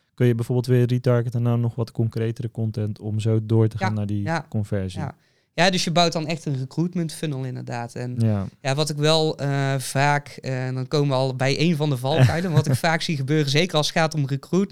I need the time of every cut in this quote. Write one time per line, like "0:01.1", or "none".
none